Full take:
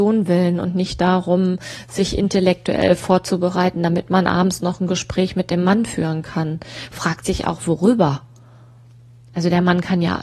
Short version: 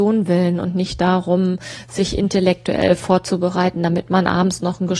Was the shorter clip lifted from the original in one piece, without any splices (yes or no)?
yes